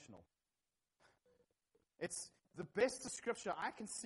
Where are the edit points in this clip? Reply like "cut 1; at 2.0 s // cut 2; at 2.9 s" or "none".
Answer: cut 1; at 2.4 s